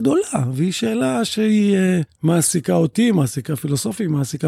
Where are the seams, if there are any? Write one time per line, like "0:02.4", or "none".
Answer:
0:02.1